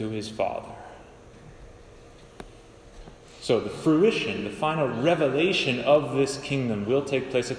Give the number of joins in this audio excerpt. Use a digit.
0